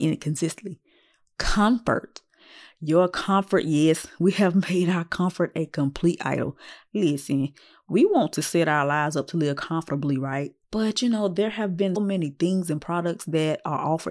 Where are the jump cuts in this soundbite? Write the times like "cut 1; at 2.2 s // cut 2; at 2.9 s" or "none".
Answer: cut 1; at 10.6 s // cut 2; at 12.0 s